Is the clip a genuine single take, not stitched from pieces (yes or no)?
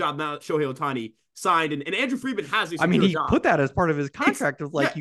yes